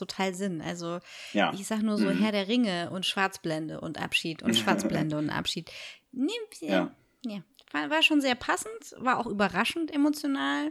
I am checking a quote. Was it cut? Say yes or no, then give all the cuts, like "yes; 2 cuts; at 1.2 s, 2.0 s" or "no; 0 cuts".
no; 0 cuts